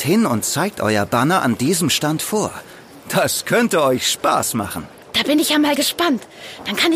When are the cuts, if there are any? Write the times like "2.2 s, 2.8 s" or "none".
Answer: 5.0 s